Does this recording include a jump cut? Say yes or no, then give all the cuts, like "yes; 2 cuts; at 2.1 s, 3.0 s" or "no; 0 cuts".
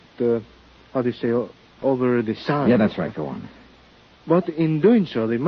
no; 0 cuts